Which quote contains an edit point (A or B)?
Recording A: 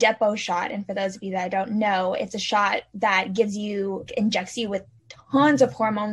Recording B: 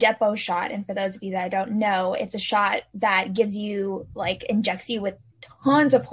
A